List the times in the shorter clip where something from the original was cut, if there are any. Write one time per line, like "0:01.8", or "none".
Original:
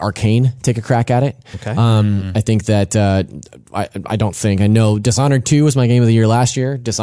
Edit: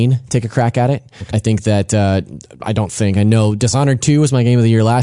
0:01.3
0:02.6